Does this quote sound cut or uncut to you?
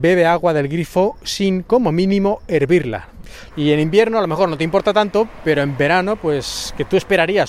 cut